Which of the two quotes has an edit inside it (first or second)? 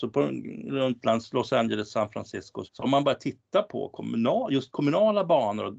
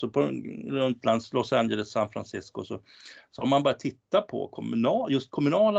first